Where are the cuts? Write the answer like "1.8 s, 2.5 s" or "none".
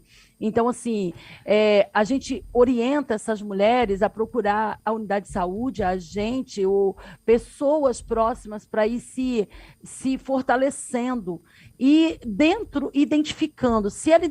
none